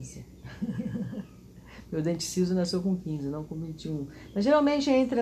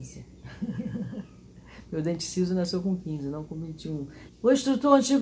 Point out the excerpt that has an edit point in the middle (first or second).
second